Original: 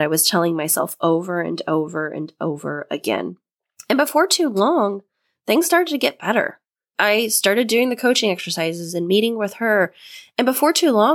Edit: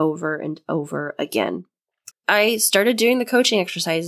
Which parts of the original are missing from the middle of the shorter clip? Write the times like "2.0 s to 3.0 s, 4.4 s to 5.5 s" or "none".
3.8 s to 6.8 s

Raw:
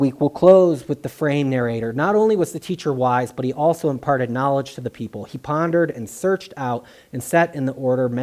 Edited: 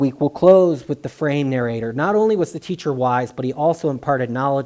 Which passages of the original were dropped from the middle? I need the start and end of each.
none

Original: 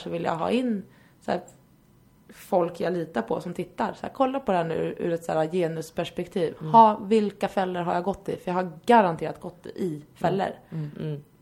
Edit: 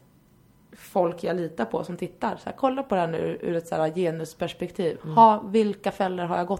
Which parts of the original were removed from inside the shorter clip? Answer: none

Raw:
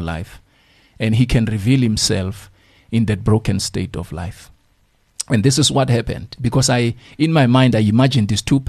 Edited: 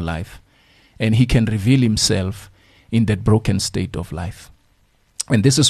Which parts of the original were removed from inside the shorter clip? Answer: none

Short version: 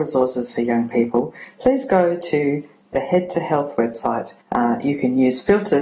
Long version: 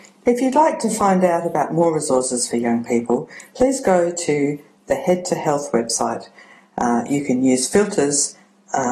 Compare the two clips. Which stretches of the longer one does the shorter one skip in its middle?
6.4 s to 6.7 s

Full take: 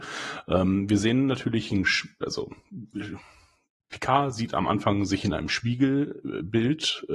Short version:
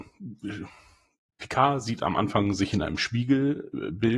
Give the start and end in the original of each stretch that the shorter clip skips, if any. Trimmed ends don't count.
none

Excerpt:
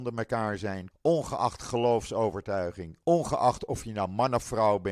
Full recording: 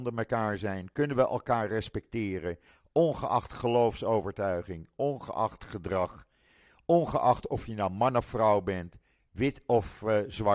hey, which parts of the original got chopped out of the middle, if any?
0.9 s to 2.8 s, 4.9 s to 6.8 s

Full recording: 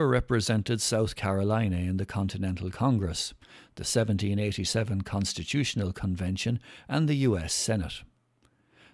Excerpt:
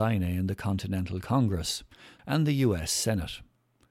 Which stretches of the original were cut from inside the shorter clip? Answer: 3.7 s to 6.8 s

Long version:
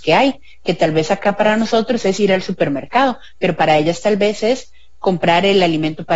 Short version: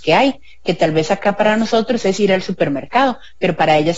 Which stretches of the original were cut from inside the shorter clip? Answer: none

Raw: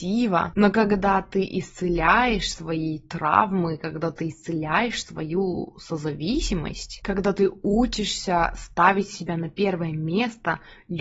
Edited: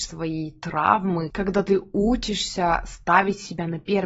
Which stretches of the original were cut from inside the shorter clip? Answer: 3.8 s to 7.0 s

